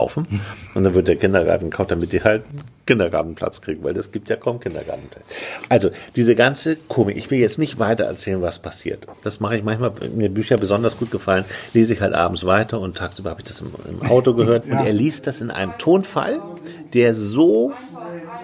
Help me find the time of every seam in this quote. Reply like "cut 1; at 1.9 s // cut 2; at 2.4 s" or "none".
cut 1; at 9.2 s // cut 2; at 14.6 s